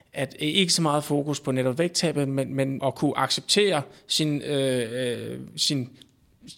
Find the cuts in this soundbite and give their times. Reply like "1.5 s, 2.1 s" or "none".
2.8 s